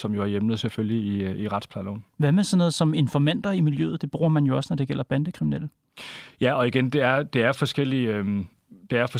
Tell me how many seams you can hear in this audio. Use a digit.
0